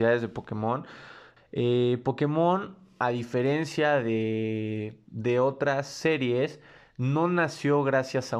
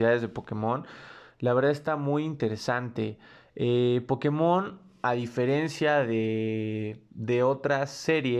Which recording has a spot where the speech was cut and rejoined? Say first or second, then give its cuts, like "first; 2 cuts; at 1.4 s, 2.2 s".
first; 1 cut; at 1.4 s